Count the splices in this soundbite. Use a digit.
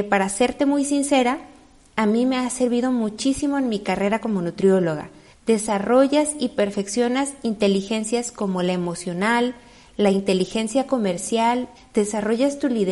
2